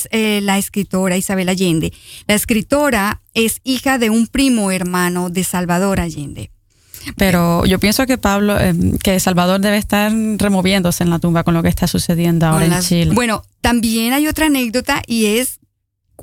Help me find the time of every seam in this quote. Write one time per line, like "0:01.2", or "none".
0:07.1
0:13.1